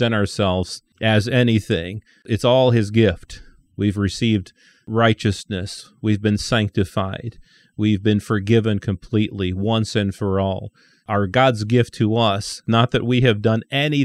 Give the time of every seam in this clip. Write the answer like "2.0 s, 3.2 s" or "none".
11.0 s, 12.7 s